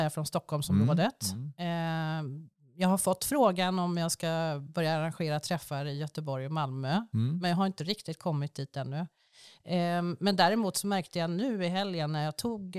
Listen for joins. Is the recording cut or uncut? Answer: uncut